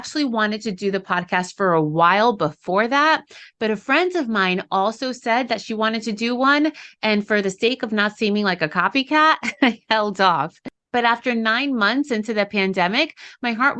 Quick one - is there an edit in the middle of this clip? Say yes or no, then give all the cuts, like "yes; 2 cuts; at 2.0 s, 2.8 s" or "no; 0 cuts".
no; 0 cuts